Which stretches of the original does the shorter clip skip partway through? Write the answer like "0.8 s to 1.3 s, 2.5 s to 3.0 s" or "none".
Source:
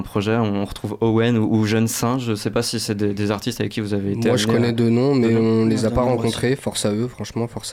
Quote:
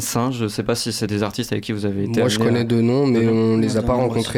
2.9 s to 3.2 s